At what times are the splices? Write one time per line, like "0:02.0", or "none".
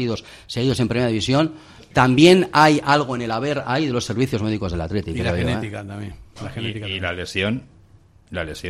none